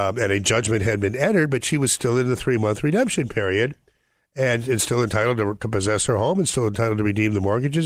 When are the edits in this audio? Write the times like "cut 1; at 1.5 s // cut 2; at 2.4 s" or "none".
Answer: none